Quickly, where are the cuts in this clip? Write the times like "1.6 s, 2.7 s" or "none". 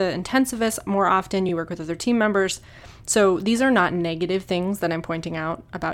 none